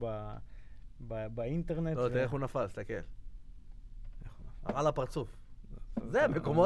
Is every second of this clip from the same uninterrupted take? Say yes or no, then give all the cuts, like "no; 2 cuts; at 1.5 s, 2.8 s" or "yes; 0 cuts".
yes; 0 cuts